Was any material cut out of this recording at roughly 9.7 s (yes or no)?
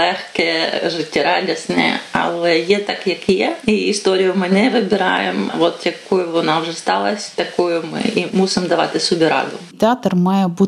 yes